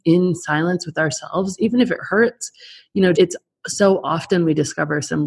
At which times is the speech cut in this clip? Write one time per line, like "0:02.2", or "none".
0:03.1